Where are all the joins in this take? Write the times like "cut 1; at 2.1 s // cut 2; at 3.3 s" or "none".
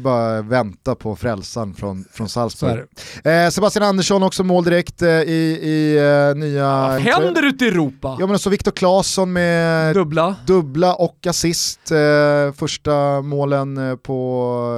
cut 1; at 7.0 s